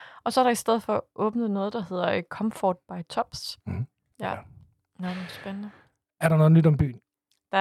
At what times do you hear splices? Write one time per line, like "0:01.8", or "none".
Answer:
0:04.1